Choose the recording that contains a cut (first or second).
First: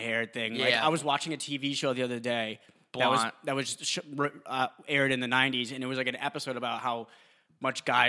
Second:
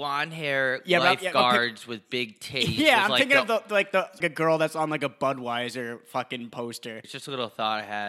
second